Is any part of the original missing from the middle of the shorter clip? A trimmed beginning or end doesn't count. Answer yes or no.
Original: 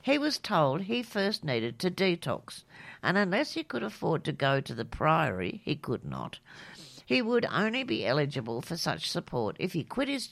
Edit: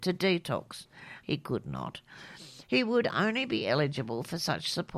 yes